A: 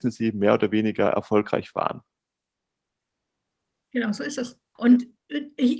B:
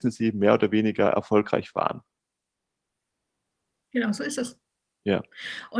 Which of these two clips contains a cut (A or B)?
A